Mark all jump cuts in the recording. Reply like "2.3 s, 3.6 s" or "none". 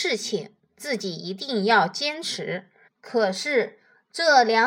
2.9 s